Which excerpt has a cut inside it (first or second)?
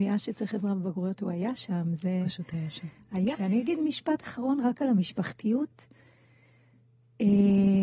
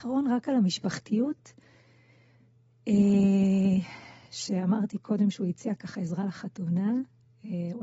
first